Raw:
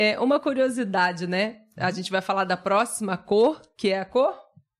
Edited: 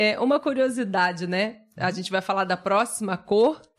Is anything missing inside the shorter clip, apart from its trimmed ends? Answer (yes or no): no